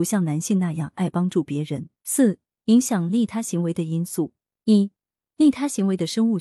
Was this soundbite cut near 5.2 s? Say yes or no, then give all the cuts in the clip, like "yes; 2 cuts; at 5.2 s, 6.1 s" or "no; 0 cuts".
no; 1 cut; at 2.0 s